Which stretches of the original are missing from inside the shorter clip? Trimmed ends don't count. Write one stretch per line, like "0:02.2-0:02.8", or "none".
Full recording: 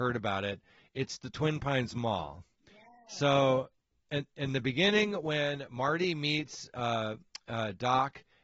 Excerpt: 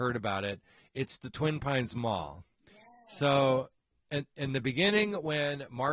none